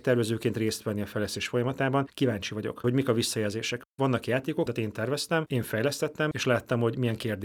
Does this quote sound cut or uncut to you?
cut